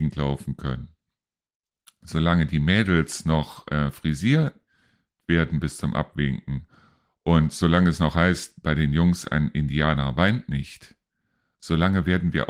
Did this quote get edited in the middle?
no; 0 cuts

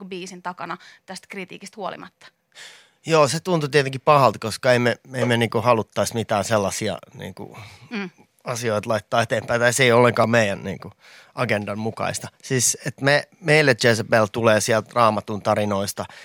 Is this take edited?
no; 0 cuts

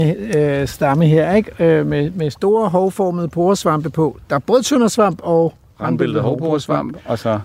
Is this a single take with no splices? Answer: yes; 0 cuts

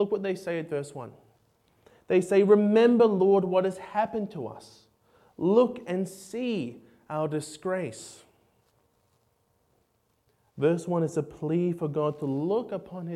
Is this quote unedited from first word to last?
yes; 0 cuts

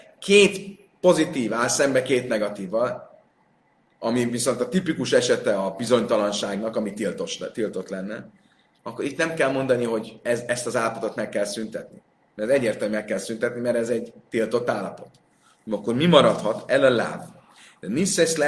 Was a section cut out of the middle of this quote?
no; 0 cuts

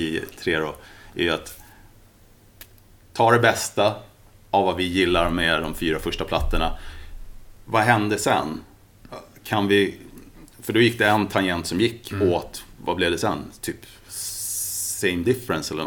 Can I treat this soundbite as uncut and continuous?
yes; 0 cuts

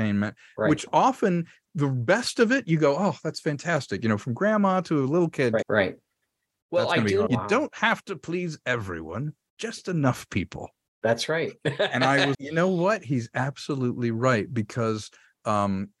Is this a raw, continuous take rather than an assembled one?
no; 3 cuts; at 5.6 s, 7.3 s, 12.3 s

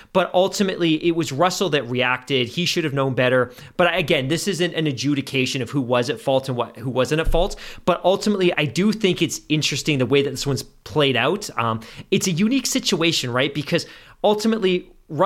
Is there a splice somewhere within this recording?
yes; 1 cut; at 8.5 s

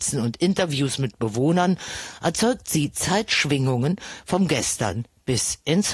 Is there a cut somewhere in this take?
no; 0 cuts

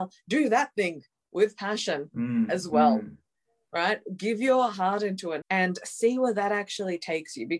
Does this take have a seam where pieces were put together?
yes; 1 cut; at 5.4 s

